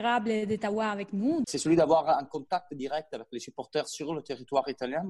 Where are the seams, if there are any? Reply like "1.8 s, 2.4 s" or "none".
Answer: 1.4 s